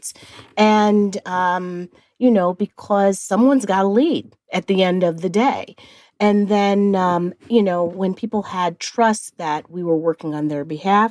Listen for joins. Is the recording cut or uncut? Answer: uncut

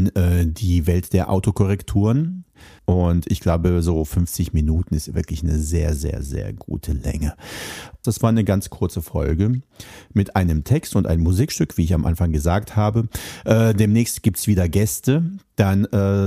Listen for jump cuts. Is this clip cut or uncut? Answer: cut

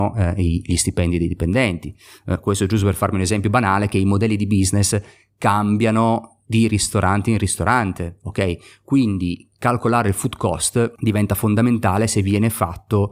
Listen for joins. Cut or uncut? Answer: uncut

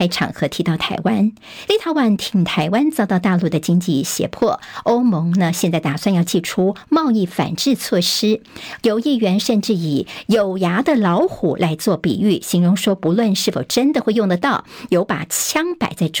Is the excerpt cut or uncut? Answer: cut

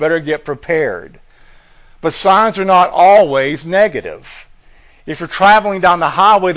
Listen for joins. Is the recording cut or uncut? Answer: uncut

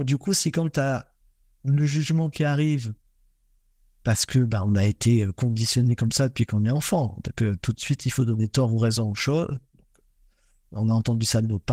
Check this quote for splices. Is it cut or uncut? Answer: uncut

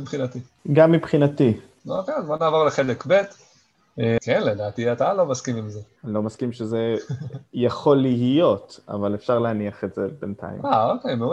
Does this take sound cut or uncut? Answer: cut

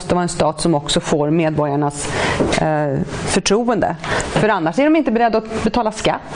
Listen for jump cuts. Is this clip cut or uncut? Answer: uncut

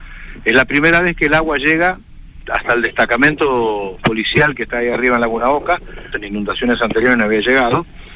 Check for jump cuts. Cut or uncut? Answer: cut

